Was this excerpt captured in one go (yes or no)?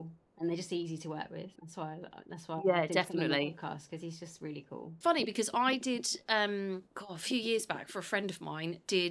no